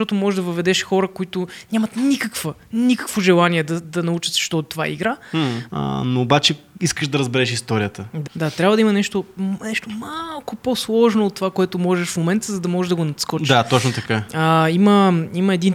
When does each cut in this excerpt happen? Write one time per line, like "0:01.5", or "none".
0:05.7
0:08.3